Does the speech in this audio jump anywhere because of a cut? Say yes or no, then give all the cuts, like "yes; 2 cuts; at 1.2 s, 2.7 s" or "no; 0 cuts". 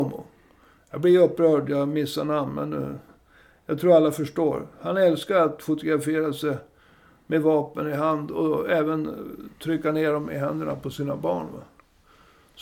no; 0 cuts